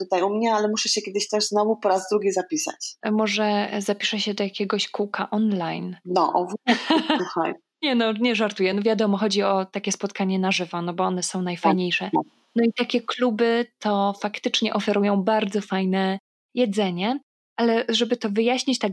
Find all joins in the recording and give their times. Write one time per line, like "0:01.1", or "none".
none